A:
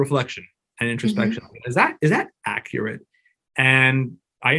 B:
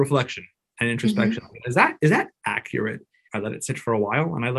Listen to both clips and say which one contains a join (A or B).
B